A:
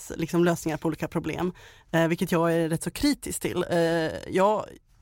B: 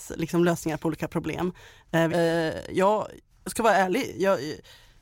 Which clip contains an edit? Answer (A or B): B